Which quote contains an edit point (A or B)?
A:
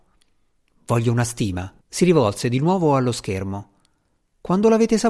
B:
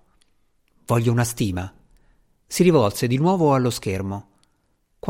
A